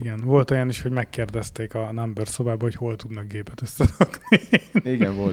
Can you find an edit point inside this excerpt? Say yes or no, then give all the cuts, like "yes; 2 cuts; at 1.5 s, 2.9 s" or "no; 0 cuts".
no; 0 cuts